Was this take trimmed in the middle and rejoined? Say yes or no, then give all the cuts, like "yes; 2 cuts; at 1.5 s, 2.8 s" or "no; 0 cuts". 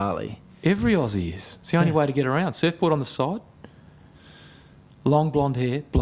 no; 0 cuts